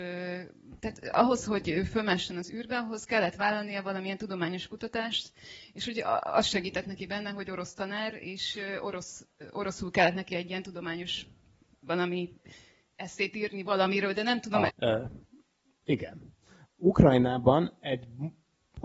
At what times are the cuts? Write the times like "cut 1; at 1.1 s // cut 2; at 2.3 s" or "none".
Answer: cut 1; at 14.7 s // cut 2; at 16.6 s